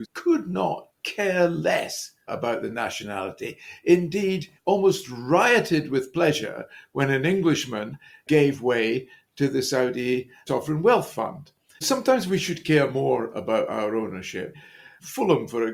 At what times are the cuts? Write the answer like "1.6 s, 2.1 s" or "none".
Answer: 11.8 s